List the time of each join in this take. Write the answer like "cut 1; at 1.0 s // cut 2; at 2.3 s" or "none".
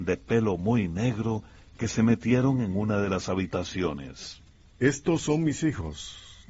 cut 1; at 4.8 s